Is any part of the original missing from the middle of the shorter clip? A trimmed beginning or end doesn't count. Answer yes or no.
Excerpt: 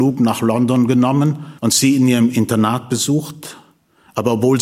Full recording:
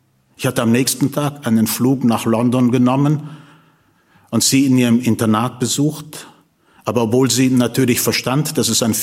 yes